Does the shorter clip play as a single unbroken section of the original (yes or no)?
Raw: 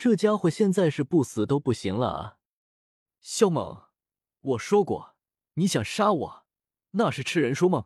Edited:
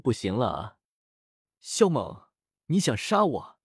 no